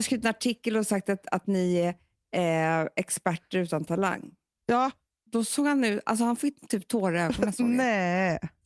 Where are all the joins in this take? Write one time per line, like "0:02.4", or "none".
none